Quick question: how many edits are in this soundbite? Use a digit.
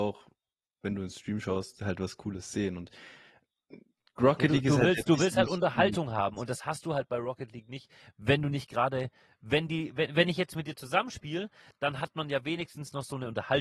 0